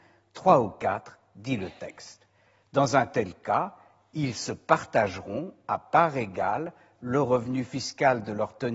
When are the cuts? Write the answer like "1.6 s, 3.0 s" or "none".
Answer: none